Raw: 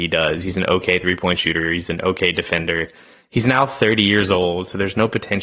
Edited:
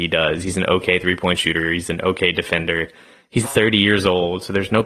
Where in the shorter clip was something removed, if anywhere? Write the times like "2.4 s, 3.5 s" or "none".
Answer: 3.4 s